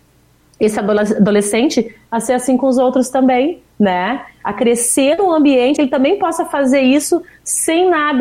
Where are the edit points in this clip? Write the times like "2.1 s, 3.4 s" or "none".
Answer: 5.8 s